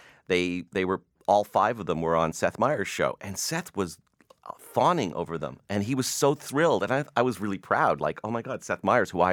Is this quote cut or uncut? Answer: uncut